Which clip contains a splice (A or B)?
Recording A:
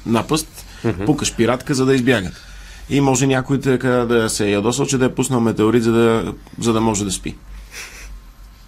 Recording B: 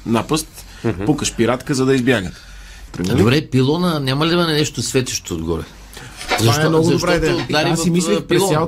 B